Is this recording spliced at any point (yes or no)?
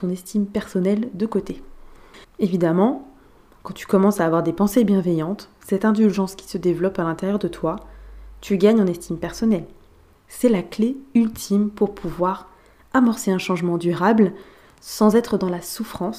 yes